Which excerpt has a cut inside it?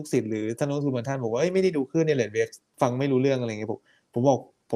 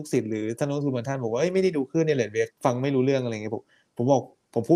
second; 1 cut; at 2.5 s

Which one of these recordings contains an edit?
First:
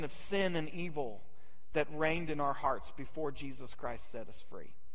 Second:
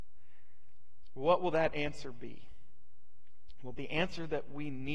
second; 1 cut; at 3.7 s

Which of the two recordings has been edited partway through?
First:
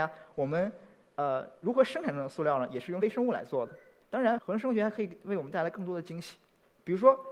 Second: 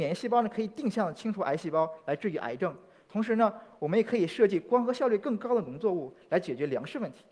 first; 1 cut; at 4.4 s

